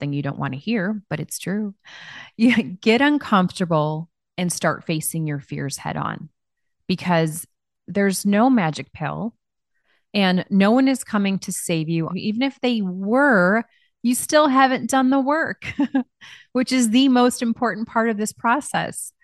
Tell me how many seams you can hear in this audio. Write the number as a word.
one